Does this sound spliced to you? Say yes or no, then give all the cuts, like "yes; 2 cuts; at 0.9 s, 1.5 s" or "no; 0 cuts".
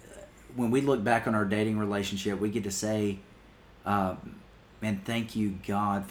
no; 0 cuts